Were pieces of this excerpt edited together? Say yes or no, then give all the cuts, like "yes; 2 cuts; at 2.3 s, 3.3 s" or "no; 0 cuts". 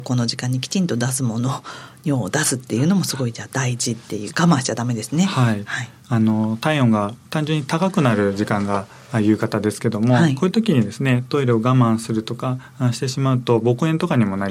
yes; 2 cuts; at 4.3 s, 7.2 s